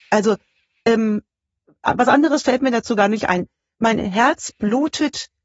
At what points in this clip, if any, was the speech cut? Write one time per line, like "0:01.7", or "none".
none